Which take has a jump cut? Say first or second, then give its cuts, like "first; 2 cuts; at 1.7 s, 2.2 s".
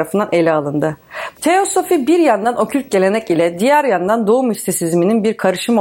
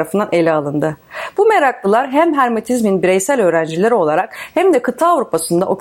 first; 1 cut; at 1.3 s